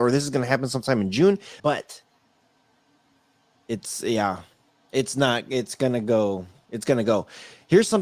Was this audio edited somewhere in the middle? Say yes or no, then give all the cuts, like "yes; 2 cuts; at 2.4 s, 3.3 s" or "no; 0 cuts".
yes; 1 cut; at 1.6 s